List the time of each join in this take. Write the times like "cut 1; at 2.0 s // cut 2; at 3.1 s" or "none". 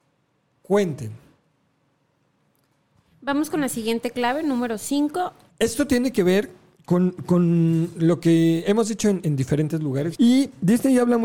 cut 1; at 5.5 s // cut 2; at 10.1 s